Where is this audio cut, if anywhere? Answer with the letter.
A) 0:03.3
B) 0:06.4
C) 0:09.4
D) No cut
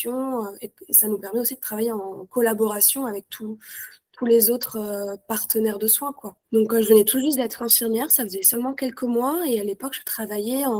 B